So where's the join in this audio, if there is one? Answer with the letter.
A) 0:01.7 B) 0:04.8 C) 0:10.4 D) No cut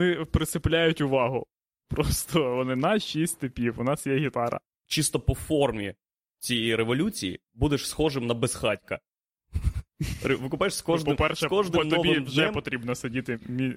B